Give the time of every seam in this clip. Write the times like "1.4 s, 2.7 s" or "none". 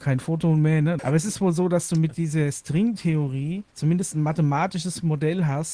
1.0 s, 3.7 s